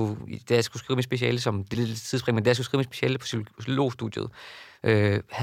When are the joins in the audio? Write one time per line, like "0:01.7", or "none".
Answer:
0:01.7